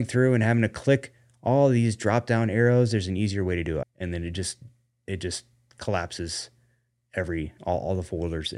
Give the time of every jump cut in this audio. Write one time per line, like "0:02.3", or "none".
0:03.8